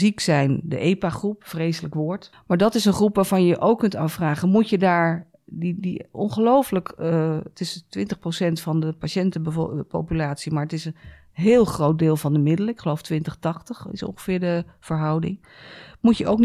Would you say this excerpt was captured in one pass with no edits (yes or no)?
no